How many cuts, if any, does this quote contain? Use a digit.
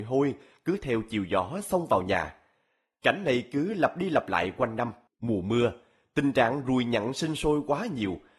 1